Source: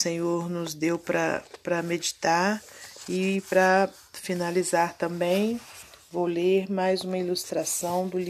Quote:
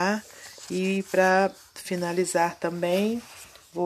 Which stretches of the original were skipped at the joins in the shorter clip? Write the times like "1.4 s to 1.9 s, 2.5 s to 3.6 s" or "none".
none